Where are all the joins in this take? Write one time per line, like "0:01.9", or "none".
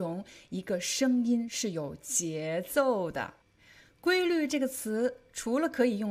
0:03.4